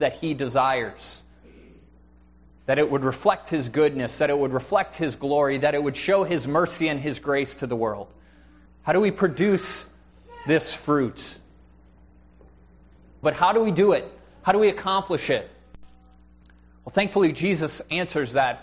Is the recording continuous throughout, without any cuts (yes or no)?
no